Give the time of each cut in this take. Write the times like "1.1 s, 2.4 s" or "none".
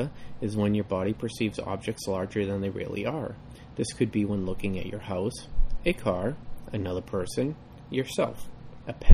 none

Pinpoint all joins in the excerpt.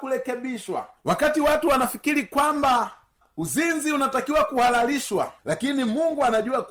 1.0 s, 5.4 s

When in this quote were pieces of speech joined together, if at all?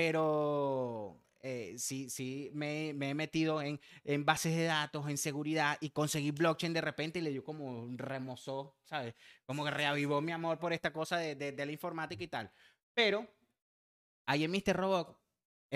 none

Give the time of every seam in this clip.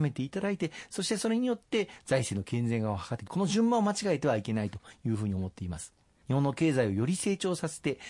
3.3 s, 6.2 s

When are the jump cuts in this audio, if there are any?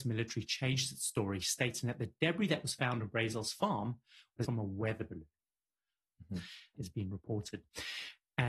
4.4 s, 6.7 s

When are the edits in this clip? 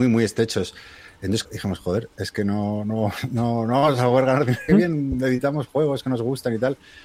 1.4 s, 4.7 s

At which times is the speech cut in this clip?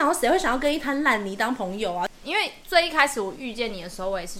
2.2 s

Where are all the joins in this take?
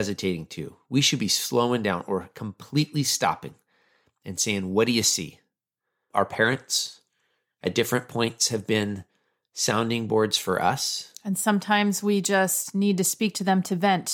6.1 s

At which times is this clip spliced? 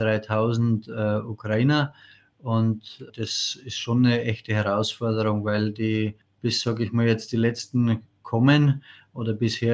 3.1 s

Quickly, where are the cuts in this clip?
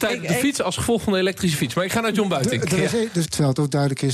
3.2 s

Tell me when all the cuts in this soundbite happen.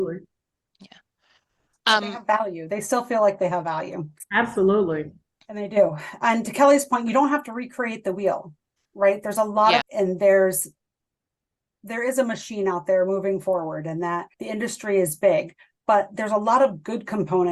9.8 s, 14.3 s

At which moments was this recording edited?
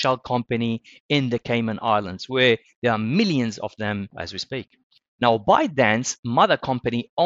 none

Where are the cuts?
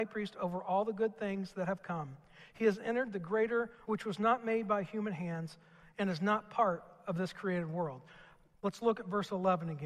3.8 s, 8.6 s

